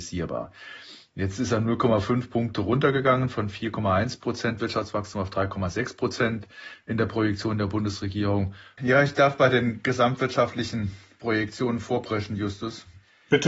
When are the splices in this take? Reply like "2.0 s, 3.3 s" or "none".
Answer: 8.8 s